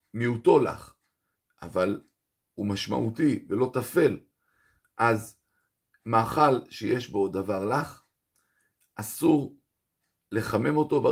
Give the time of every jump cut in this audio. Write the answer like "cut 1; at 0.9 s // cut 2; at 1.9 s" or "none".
none